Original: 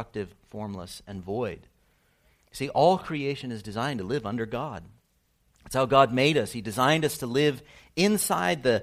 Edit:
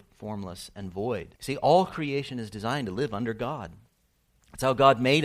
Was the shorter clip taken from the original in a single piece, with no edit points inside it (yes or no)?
no